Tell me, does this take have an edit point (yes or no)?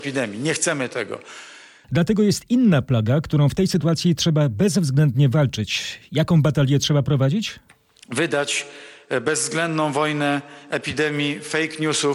yes